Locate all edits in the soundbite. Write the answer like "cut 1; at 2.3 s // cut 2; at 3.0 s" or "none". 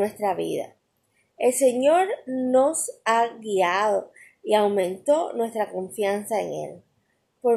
none